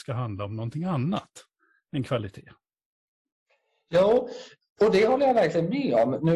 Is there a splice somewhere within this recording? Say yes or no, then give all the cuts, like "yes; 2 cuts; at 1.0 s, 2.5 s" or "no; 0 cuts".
no; 0 cuts